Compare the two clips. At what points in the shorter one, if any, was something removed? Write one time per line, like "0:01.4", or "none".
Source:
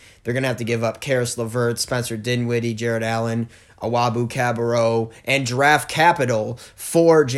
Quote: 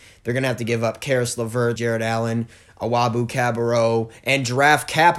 0:01.8